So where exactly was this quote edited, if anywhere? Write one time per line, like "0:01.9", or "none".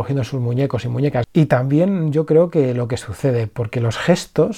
0:01.2